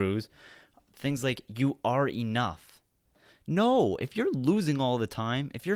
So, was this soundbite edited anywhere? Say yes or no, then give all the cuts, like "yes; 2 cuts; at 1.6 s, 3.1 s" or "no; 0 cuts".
no; 0 cuts